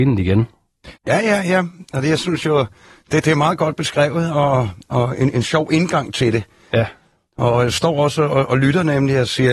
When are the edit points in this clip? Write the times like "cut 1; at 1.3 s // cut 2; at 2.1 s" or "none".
cut 1; at 1.0 s